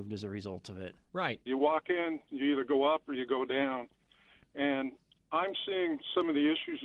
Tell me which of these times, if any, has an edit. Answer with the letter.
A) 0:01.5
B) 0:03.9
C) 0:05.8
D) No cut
A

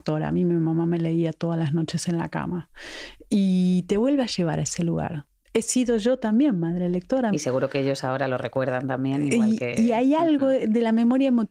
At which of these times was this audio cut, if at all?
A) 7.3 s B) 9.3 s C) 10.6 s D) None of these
A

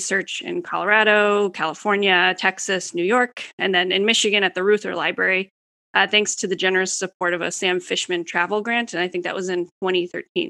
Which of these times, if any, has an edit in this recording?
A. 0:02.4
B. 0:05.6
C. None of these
C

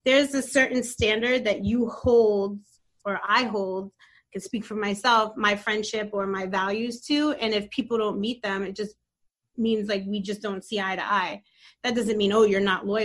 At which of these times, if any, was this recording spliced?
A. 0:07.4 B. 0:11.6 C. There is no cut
C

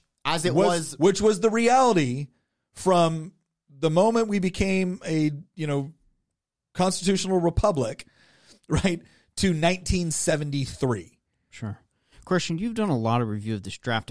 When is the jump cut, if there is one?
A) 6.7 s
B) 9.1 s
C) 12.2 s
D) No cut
D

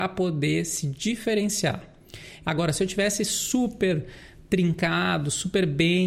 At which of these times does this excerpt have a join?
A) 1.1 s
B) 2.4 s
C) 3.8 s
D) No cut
B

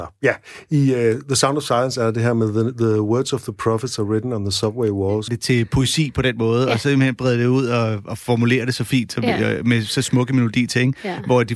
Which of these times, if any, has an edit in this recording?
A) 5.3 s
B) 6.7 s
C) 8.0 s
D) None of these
A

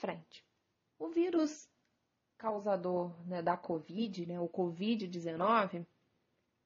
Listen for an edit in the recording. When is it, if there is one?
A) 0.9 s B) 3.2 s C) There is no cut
A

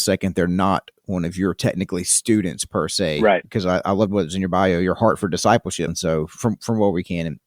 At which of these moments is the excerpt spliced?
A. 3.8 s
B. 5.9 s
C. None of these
B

